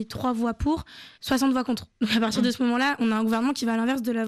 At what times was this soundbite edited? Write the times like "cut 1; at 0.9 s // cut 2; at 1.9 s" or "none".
cut 1; at 1.1 s